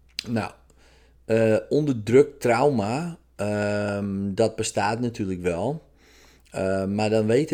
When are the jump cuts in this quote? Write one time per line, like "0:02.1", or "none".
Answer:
none

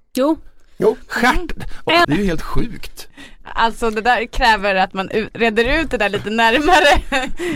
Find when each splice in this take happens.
0:02.0

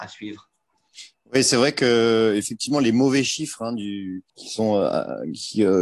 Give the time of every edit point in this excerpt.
0:04.3

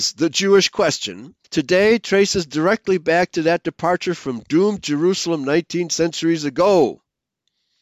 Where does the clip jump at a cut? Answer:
0:01.4

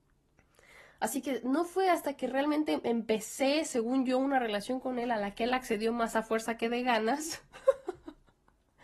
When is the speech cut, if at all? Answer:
none

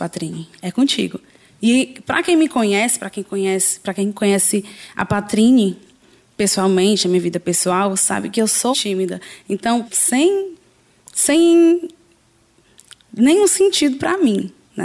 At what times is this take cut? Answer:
0:08.7
0:09.8

